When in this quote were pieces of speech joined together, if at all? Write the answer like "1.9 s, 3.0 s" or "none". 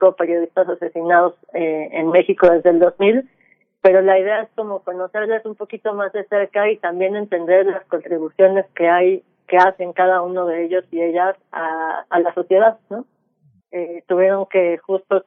13.6 s